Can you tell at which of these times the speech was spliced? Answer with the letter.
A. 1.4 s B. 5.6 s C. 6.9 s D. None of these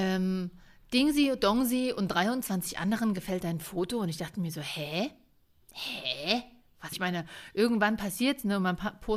C